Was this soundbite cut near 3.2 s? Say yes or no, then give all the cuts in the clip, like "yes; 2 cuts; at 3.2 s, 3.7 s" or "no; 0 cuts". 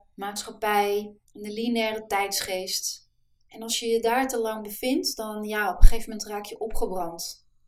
no; 1 cut; at 1.2 s